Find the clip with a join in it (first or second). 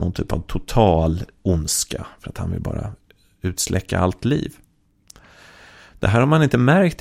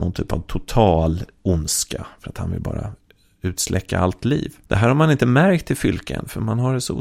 second